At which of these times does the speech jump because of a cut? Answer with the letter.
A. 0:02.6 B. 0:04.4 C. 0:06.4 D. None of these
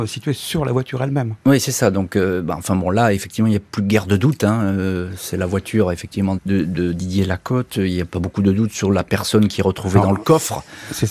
C